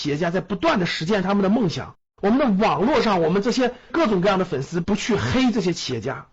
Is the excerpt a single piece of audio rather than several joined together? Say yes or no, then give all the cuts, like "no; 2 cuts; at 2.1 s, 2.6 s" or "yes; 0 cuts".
no; 1 cut; at 2.1 s